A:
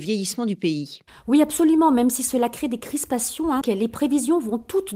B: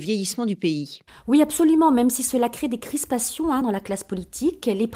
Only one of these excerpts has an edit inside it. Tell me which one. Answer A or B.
A